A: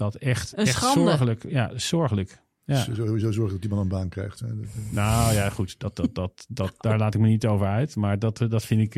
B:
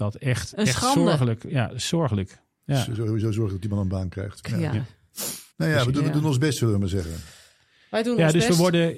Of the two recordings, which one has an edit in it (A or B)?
B